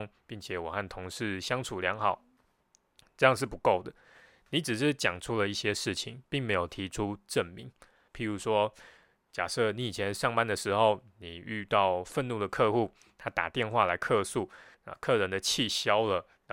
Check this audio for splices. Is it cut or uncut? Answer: cut